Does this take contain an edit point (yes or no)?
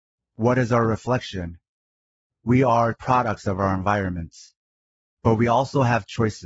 yes